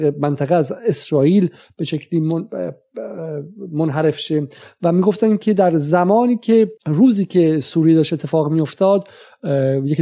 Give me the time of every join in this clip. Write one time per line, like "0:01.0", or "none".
0:06.8